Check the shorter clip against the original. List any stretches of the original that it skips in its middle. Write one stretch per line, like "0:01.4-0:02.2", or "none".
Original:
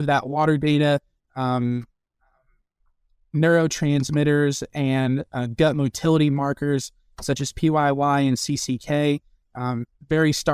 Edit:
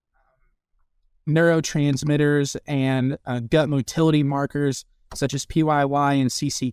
none